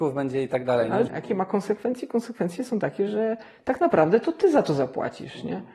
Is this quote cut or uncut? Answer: cut